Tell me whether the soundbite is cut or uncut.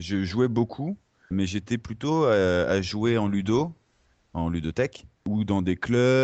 cut